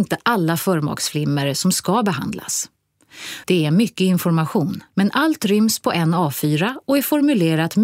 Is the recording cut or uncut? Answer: cut